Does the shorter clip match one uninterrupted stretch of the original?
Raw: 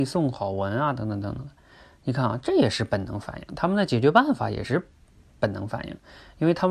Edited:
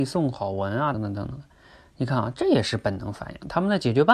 no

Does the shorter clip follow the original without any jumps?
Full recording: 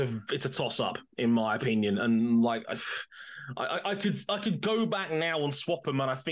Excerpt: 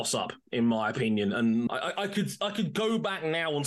no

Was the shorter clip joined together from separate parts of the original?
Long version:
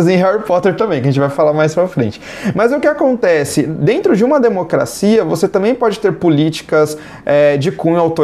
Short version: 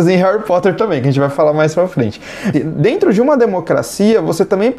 yes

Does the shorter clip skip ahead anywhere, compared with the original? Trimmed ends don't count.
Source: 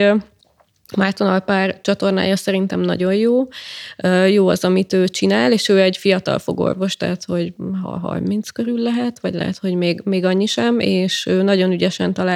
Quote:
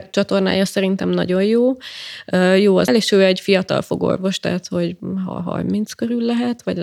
yes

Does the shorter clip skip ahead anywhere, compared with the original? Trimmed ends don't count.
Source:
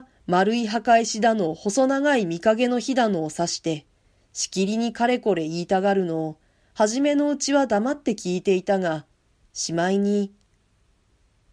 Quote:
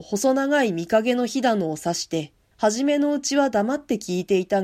yes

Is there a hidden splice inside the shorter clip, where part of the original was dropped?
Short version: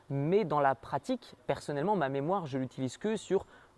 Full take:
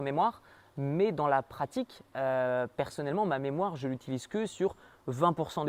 yes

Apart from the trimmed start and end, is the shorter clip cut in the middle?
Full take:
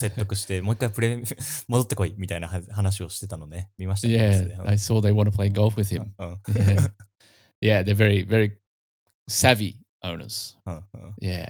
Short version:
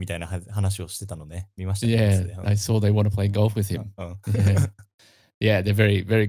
no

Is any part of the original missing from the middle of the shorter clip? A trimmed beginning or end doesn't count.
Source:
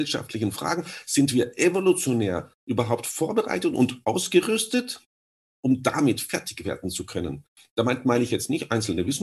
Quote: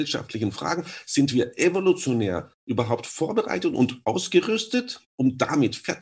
yes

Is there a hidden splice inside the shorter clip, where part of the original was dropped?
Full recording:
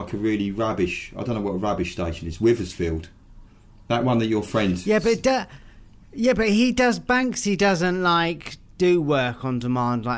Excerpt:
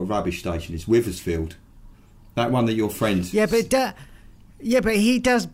no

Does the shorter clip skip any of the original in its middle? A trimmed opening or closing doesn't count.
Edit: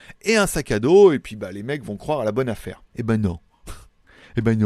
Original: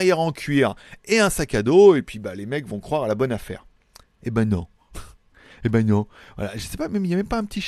yes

